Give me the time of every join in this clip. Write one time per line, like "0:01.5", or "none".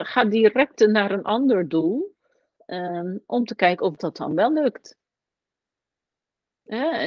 0:04.0